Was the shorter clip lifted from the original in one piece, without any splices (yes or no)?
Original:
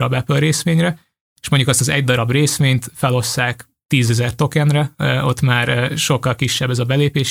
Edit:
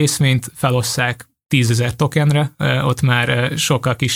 yes